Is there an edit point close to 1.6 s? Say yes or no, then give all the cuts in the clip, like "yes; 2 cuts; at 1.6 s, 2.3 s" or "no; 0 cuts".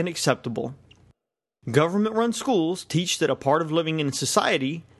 no; 0 cuts